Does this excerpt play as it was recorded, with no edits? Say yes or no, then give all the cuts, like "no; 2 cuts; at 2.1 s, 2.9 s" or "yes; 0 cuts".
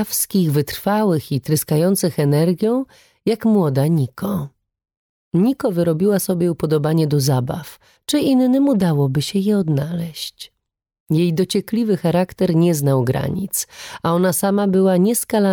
no; 1 cut; at 8.0 s